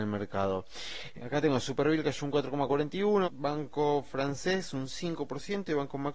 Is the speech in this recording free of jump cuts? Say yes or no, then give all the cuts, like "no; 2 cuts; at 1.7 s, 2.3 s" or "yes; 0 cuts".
no; 2 cuts; at 1.1 s, 3.2 s